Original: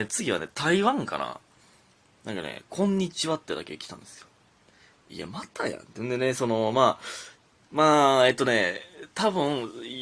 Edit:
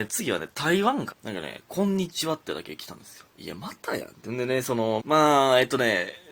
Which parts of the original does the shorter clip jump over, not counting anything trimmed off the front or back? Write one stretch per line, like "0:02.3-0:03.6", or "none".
0:01.1-0:02.1
0:04.3-0:05.0
0:06.7-0:07.7